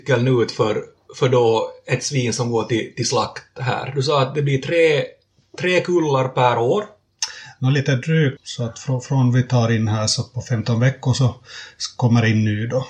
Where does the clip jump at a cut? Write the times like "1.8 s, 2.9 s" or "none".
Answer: 8.4 s